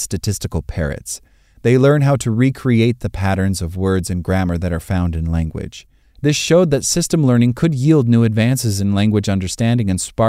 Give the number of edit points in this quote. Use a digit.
1